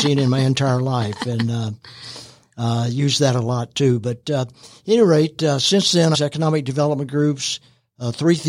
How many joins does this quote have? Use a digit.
1